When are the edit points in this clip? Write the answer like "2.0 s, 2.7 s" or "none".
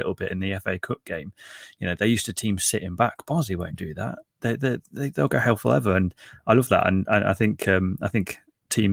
none